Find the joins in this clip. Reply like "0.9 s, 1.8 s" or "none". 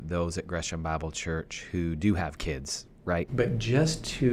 3.3 s

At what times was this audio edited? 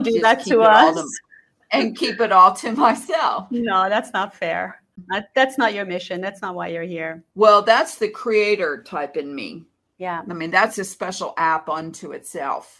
7.3 s

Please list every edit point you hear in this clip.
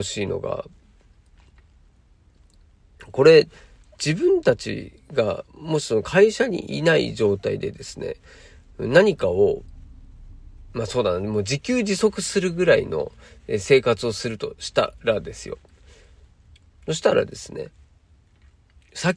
none

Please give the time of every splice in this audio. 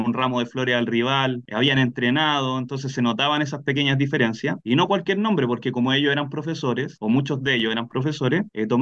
4.6 s

